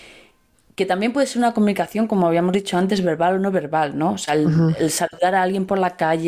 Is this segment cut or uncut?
uncut